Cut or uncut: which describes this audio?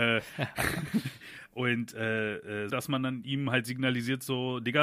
cut